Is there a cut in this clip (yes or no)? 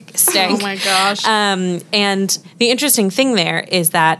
no